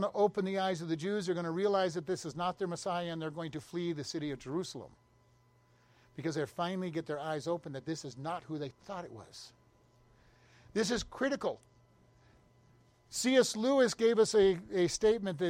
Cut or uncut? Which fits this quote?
cut